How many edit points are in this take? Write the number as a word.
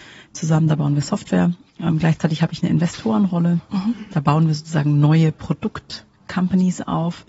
one